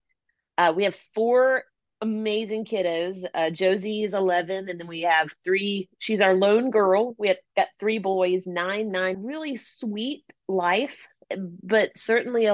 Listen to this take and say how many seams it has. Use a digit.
2